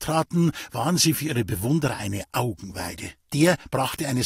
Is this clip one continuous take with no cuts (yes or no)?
no